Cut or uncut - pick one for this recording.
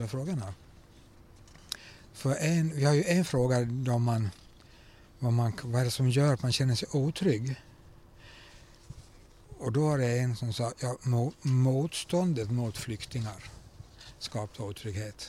uncut